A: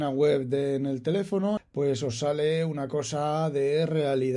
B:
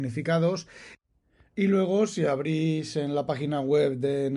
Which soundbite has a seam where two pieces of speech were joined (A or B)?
A